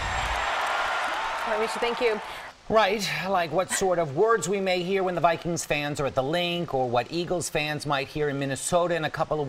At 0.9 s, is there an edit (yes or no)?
no